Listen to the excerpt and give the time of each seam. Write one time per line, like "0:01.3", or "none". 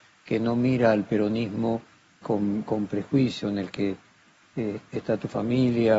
0:02.2